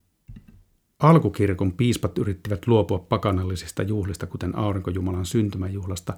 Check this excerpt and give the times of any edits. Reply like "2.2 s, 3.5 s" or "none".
none